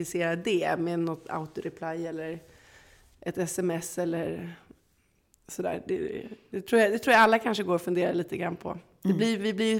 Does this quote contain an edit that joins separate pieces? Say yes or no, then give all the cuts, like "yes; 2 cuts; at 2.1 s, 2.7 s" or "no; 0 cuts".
no; 0 cuts